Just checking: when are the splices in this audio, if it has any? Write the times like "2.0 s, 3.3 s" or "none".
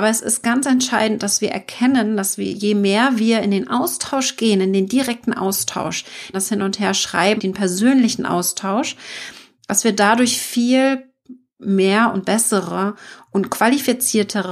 6.3 s, 7.4 s